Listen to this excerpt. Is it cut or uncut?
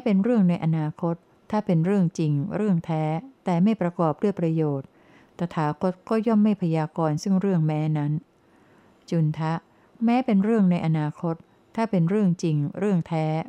uncut